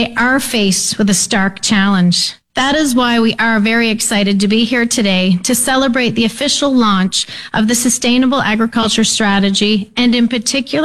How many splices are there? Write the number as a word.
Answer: one